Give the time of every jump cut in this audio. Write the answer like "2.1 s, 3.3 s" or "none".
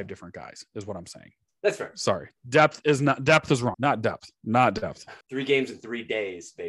3.7 s, 5.2 s